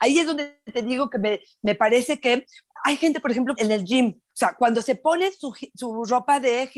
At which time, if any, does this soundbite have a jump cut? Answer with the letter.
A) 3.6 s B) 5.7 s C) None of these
A